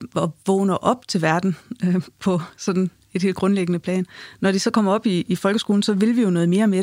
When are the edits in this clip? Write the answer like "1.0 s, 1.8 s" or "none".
none